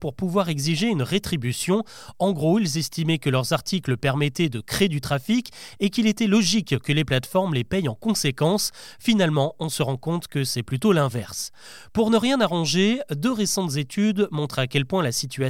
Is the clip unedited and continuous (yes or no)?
yes